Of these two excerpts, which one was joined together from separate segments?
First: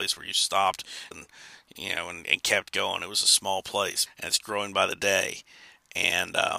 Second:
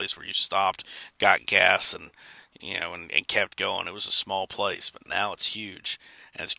first; 2 cuts; at 1.1 s, 4.1 s

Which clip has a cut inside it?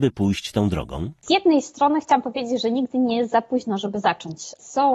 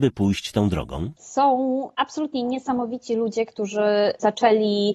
second; 1 cut; at 1.2 s

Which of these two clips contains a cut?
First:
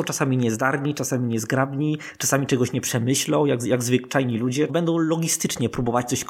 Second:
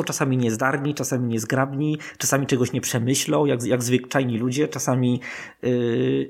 first; 1 cut; at 4.7 s

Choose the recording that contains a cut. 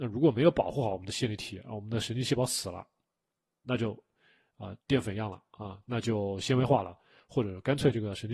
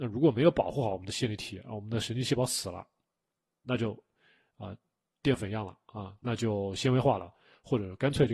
first; 1 cut; at 4.8 s

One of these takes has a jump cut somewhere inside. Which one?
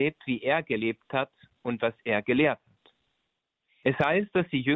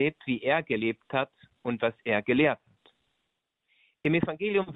first; 1 cut; at 3.8 s

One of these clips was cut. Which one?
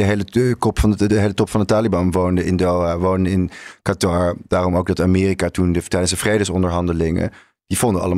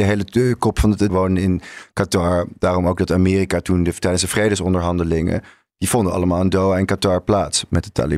second; 1 cut; at 1.1 s

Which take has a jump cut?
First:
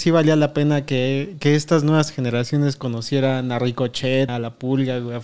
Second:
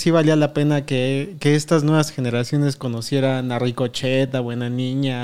first; 1 cut; at 4.3 s

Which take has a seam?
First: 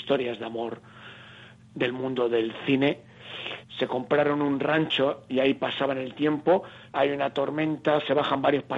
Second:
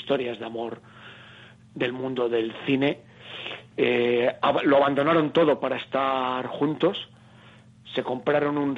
first; 2 cuts; at 3.6 s, 6.9 s

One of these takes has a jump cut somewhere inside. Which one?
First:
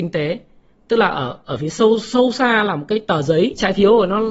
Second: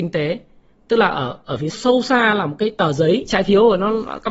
second; 1 cut; at 1.7 s

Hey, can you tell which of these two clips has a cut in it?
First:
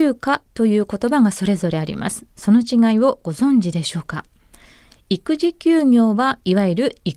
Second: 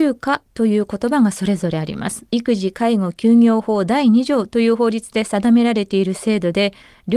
second; 1 cut; at 2.3 s

